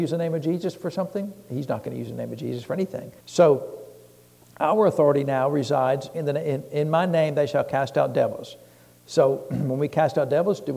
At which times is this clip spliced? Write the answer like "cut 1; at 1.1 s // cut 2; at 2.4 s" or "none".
cut 1; at 3.2 s